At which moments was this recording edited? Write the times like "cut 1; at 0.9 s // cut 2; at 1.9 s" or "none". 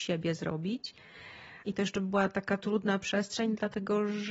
cut 1; at 1.6 s